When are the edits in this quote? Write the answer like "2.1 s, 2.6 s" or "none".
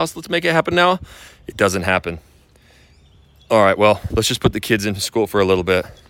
none